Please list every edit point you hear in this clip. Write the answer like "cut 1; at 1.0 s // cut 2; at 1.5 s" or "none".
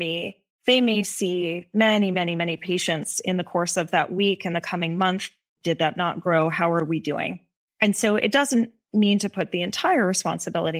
cut 1; at 5.6 s